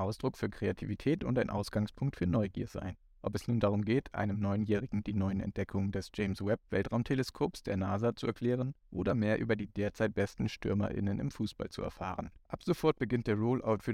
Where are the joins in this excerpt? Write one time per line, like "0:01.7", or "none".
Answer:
0:12.4